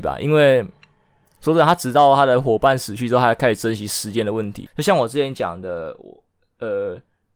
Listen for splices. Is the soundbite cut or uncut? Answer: cut